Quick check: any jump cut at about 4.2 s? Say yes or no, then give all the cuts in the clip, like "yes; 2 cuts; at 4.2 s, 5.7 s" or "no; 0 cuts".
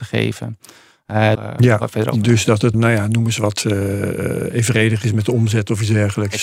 no; 2 cuts; at 1.3 s, 2.7 s